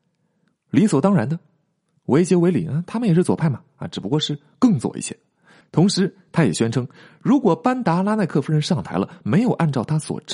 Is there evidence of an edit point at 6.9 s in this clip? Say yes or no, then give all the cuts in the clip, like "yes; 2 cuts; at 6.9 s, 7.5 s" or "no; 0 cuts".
no; 1 cut; at 5.6 s